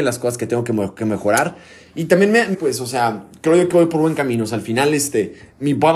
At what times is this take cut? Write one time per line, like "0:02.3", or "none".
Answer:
0:02.5